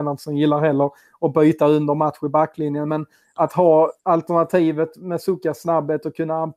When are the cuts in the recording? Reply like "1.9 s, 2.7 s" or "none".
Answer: 4.0 s